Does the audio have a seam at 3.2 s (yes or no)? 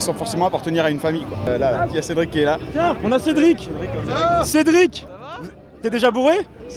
no